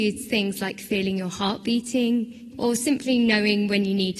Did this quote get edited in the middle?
yes; 1 cut; at 2.5 s

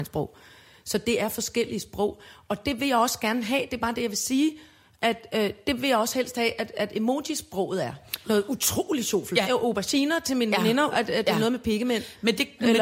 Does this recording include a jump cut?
yes; 3 cuts; at 8.2 s, 9.4 s, 10.9 s

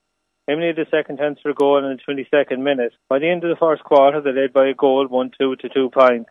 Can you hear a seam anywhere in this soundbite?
yes; 1 cut; at 3.0 s

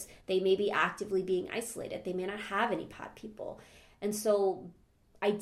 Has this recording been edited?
no; 0 cuts

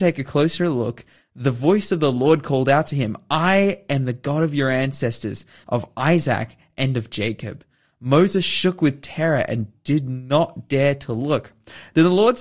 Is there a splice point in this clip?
yes; 1 cut; at 5.6 s

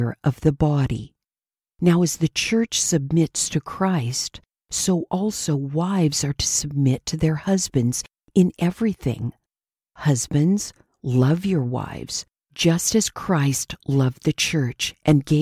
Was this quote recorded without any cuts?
yes; 0 cuts

